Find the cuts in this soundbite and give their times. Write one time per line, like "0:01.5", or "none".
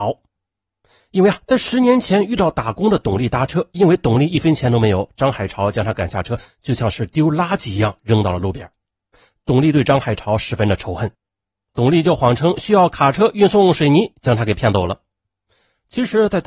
0:11.7